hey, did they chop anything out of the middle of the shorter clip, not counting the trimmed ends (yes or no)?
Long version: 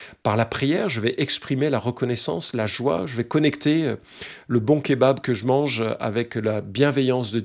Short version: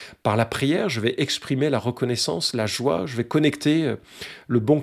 no